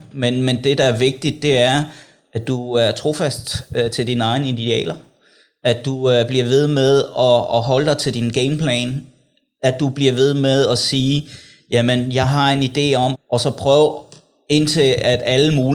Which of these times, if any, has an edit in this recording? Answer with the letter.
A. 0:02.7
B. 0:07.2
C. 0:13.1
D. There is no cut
C